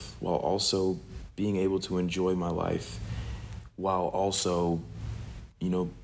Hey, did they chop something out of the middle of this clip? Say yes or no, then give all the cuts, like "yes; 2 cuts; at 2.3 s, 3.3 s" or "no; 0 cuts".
no; 0 cuts